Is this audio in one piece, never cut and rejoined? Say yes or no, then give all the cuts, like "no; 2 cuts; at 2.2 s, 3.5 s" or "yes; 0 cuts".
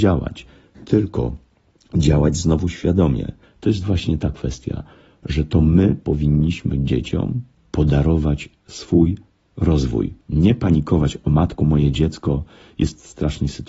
no; 2 cuts; at 3.4 s, 10.2 s